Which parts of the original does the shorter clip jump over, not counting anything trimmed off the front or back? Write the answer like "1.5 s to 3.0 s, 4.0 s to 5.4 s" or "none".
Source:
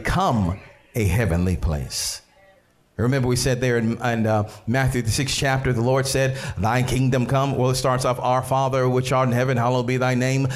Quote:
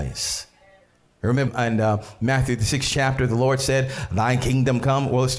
3.2 s to 3.9 s